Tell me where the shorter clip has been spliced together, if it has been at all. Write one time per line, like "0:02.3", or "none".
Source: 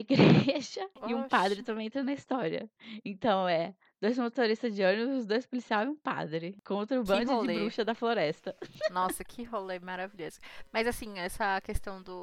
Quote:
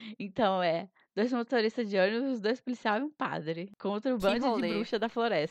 none